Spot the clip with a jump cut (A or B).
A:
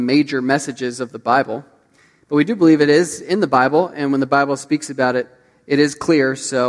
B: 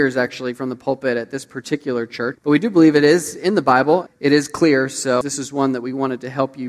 B